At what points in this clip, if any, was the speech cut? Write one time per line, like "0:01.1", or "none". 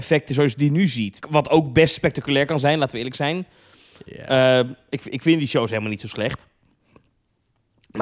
0:01.2